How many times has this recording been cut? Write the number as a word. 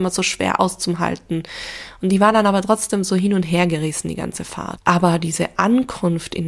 one